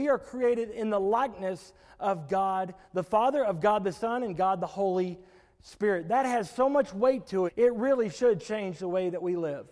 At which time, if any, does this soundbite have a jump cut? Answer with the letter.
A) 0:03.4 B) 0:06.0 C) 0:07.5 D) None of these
C